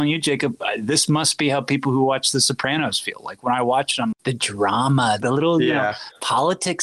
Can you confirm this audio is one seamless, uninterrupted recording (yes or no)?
no